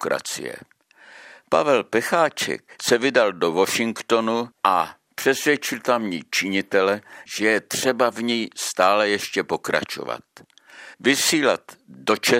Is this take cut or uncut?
cut